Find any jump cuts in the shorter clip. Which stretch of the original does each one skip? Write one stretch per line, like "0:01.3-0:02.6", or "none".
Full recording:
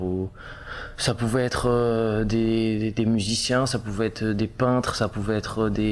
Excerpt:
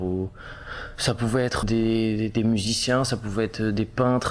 0:01.6-0:02.2